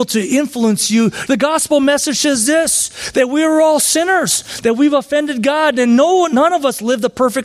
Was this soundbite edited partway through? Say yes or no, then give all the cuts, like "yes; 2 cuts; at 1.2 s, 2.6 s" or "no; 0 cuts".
yes; 1 cut; at 1.3 s